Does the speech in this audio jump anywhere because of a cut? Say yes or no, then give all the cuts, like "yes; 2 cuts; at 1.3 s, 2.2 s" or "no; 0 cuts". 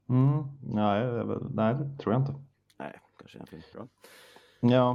yes; 1 cut; at 3.7 s